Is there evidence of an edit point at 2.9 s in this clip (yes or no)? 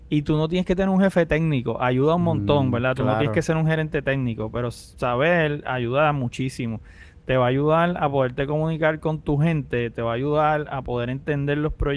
no